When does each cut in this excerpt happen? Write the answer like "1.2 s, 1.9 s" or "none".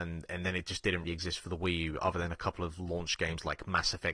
1.0 s